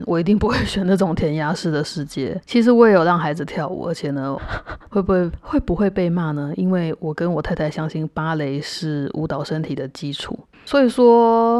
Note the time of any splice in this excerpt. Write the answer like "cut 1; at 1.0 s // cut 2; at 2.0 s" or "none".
cut 1; at 4.4 s // cut 2; at 10.5 s